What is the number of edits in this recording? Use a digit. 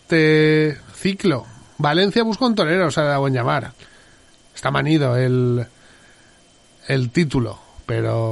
0